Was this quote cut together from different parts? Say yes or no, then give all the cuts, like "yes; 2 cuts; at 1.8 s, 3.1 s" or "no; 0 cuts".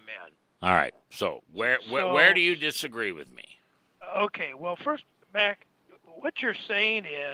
no; 0 cuts